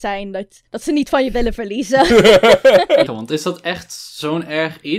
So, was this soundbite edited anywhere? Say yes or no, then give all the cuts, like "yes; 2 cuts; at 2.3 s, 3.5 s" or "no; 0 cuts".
yes; 1 cut; at 3.1 s